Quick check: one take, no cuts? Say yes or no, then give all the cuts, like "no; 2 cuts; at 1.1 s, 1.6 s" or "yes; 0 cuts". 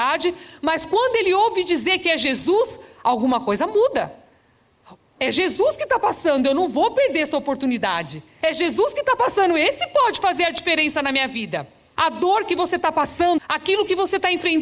no; 3 cuts; at 8.4 s, 12.0 s, 13.4 s